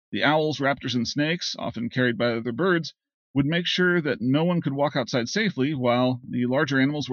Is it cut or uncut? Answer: uncut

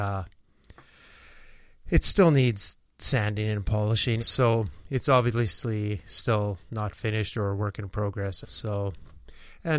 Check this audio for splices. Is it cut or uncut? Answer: cut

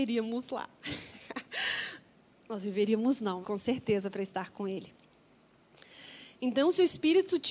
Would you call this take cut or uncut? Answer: cut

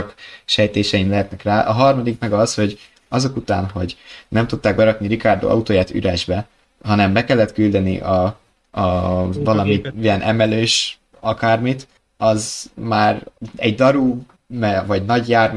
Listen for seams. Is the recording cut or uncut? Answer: uncut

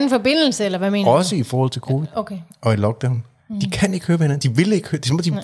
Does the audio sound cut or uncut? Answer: uncut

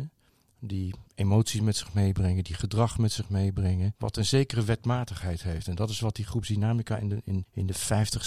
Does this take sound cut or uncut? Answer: uncut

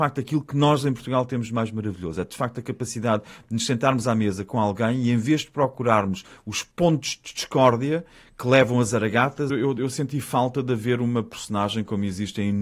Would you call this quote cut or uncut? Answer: cut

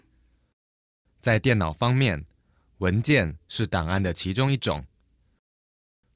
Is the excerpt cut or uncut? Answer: cut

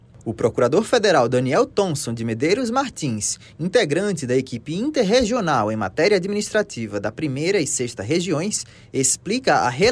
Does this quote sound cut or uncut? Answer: uncut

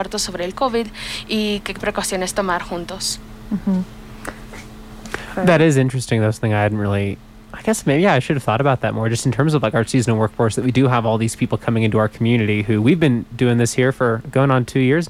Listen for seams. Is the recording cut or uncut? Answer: uncut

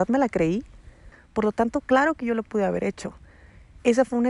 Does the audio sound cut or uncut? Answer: cut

